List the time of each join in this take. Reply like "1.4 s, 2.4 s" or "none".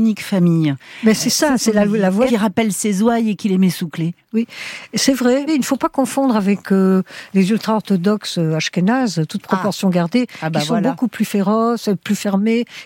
2.3 s, 5.5 s